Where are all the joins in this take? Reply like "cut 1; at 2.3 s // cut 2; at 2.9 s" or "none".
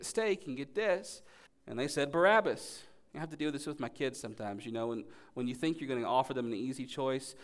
cut 1; at 1.5 s